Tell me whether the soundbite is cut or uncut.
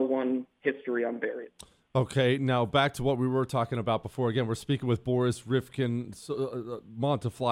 uncut